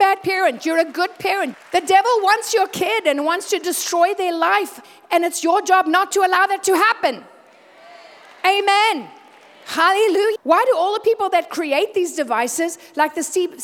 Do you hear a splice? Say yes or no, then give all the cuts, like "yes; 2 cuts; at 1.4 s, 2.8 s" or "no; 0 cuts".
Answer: yes; 2 cuts; at 1.5 s, 10.3 s